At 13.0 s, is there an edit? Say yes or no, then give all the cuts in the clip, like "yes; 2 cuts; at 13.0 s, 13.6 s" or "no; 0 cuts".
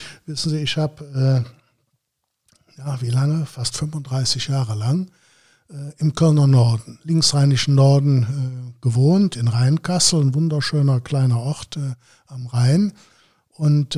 no; 0 cuts